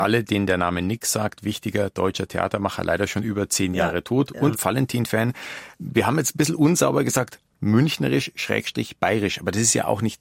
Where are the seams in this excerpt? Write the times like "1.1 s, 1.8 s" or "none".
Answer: 4.5 s

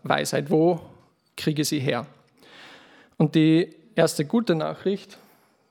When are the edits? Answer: none

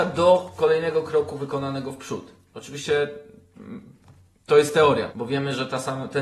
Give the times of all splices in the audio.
5.1 s

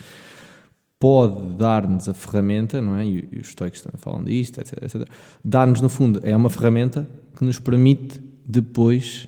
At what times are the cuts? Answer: none

